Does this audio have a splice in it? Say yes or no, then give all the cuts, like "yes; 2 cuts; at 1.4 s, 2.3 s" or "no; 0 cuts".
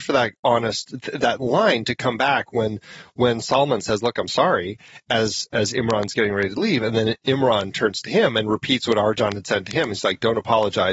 no; 0 cuts